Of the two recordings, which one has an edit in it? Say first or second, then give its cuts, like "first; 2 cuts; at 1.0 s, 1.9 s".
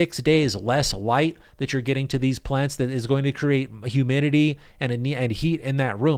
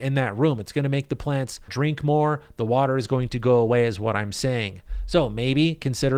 second; 1 cut; at 1.7 s